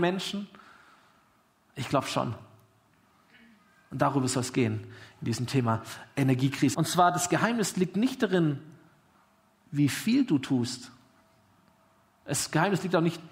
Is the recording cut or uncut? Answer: cut